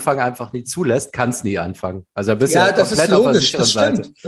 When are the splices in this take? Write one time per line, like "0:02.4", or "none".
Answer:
none